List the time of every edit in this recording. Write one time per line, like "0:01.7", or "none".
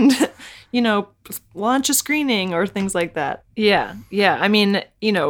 0:03.5